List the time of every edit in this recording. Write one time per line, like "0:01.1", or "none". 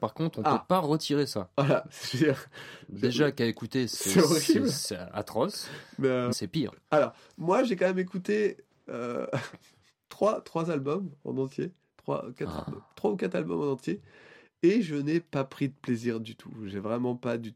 0:06.3